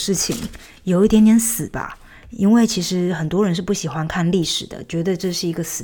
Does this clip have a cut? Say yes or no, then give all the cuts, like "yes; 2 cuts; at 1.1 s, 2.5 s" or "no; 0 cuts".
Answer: no; 0 cuts